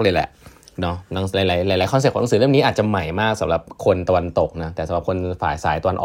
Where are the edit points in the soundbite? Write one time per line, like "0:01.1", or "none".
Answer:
none